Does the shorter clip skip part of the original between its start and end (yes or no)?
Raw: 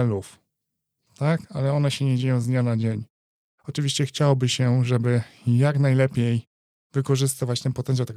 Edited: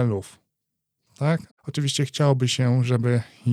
yes